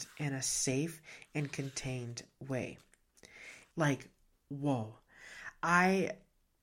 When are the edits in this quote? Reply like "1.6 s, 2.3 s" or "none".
3.7 s